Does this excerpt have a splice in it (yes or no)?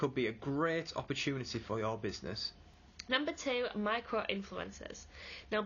no